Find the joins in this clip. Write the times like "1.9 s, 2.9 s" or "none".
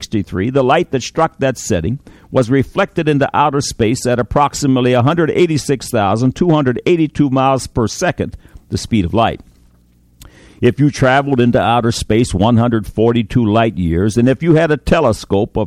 none